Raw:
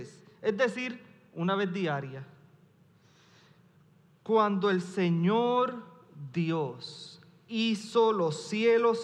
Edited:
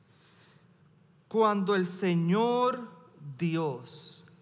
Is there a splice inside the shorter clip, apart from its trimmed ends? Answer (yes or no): no